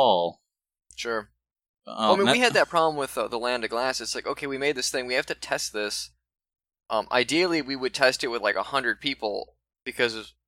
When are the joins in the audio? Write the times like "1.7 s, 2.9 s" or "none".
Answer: none